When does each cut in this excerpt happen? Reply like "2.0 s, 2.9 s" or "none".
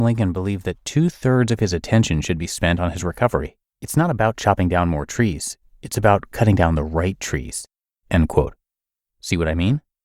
3.7 s, 8.0 s